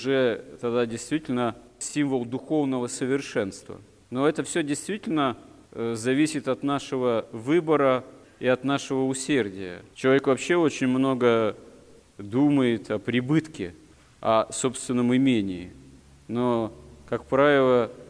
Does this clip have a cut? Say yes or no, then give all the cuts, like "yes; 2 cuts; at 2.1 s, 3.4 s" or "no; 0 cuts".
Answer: yes; 1 cut; at 9.9 s